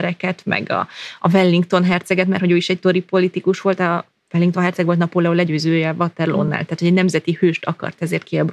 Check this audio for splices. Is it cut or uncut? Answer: uncut